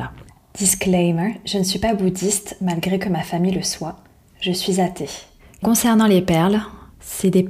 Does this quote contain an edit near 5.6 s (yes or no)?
yes